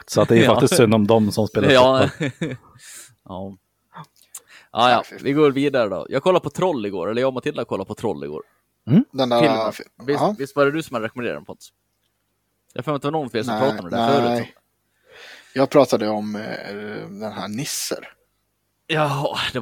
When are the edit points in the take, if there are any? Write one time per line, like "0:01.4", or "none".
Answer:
0:05.2

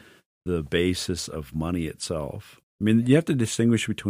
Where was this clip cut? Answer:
0:02.6

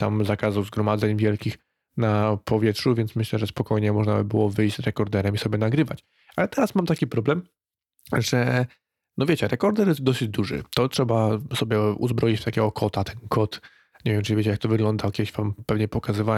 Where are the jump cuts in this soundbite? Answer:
0:10.0

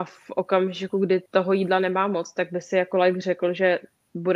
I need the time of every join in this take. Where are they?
0:01.3

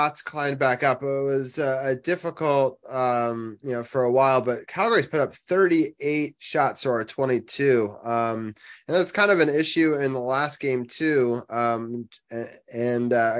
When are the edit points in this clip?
none

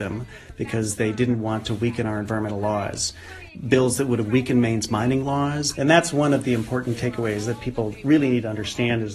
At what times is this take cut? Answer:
0:05.7

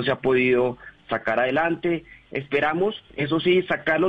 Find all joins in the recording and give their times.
0:03.1

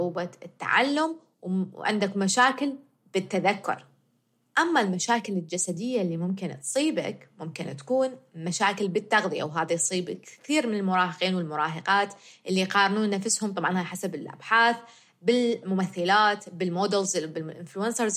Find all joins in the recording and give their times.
none

